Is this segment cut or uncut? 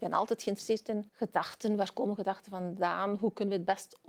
cut